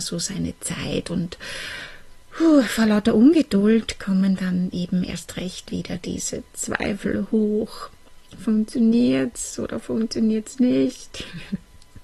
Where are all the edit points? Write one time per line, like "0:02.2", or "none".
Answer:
none

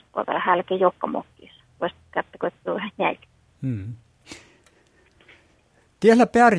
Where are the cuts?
none

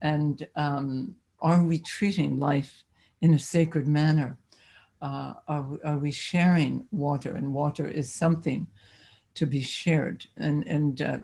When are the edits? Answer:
0:01.4

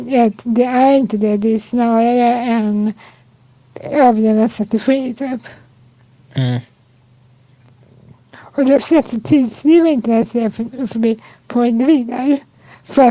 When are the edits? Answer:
none

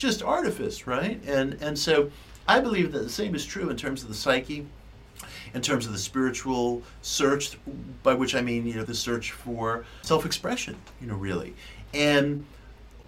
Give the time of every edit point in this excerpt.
0:08.8

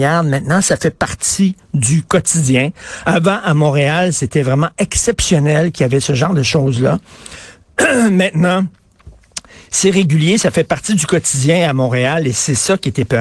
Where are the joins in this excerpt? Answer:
none

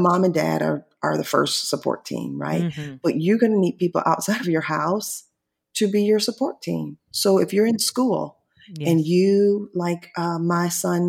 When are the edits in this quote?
none

